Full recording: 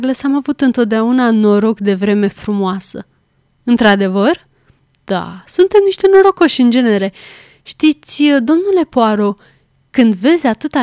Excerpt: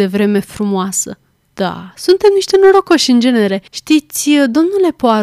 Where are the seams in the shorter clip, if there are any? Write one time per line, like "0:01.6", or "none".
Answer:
0:01.4
0:03.7